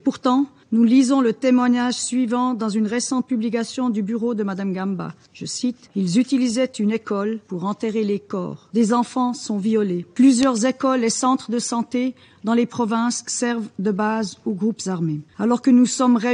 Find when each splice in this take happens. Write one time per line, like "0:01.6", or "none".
0:15.3